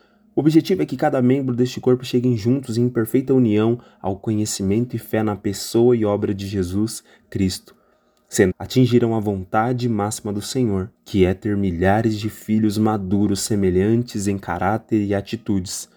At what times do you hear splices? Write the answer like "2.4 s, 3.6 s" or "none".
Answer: 8.5 s, 10.9 s